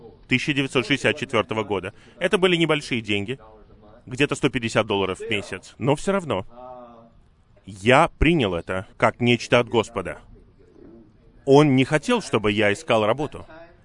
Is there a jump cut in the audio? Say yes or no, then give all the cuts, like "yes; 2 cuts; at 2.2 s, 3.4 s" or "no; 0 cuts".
yes; 2 cuts; at 7.6 s, 8.9 s